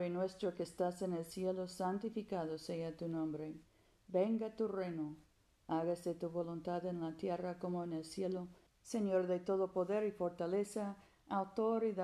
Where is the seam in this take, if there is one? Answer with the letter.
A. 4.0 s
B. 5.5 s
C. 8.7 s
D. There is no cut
C